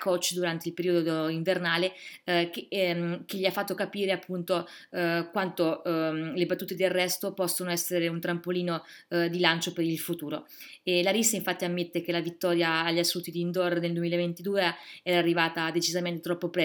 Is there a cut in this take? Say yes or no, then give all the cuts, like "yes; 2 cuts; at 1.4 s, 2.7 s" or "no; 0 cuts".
no; 0 cuts